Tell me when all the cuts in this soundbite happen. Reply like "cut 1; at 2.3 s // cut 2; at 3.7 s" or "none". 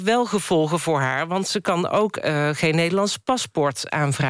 none